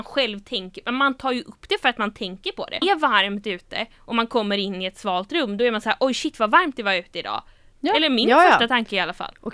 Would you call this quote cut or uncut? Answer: cut